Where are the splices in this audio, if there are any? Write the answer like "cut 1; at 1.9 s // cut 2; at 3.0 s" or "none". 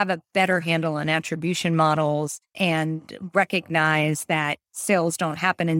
none